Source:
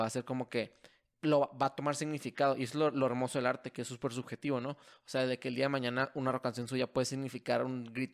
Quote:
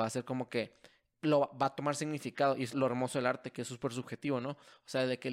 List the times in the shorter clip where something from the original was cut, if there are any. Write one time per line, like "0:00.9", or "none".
0:02.7